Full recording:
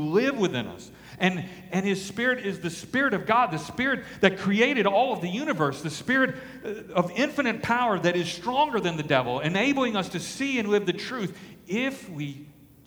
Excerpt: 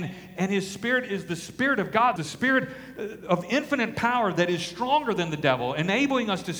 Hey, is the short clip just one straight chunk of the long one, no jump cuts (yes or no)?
no